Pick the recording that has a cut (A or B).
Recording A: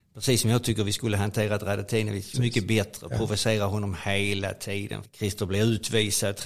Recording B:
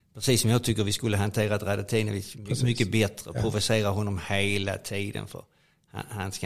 A